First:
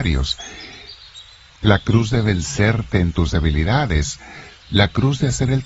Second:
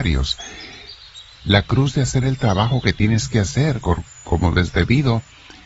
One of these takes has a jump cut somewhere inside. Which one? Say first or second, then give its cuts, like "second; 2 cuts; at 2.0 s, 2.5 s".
second; 2 cuts; at 1.4 s, 3.8 s